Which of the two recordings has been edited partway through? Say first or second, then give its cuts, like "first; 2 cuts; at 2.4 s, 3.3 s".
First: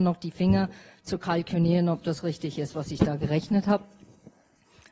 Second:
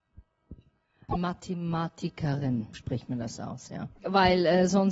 second; 2 cuts; at 1.1 s, 2.7 s